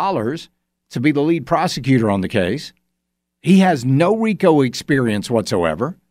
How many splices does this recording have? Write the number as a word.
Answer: zero